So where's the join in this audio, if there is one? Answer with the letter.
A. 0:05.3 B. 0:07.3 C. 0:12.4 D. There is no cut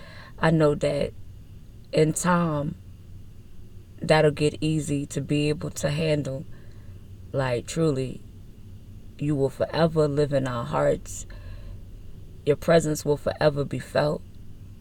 B